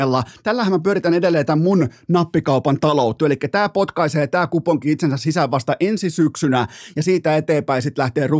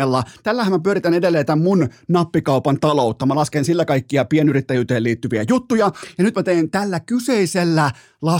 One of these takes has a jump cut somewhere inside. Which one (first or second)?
first